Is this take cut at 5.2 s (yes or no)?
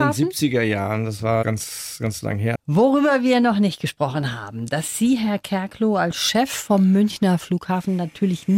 no